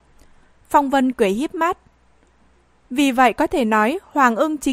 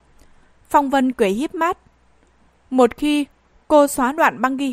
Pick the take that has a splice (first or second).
second